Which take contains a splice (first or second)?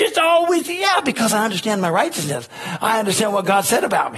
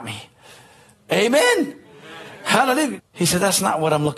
second